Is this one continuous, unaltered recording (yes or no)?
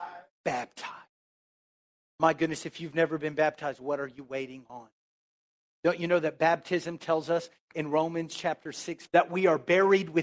no